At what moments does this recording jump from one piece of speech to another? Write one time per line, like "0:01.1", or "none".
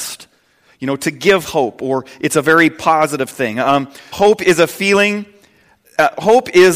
0:04.1